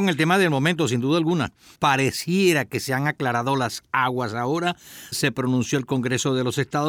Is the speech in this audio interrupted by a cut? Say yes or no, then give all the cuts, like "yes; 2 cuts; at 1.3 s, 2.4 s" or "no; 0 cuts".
yes; 2 cuts; at 1.8 s, 5.1 s